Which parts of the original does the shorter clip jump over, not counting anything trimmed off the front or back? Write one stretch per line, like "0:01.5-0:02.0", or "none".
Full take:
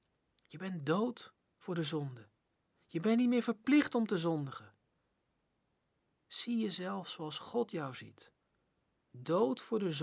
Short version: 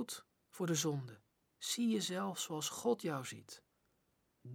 0:02.5-0:06.1